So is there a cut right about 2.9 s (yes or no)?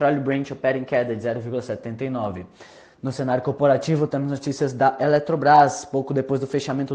no